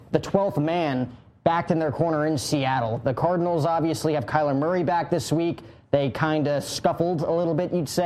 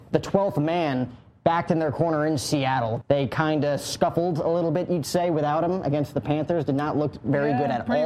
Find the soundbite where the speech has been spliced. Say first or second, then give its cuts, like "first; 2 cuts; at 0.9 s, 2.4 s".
second; 1 cut; at 3.0 s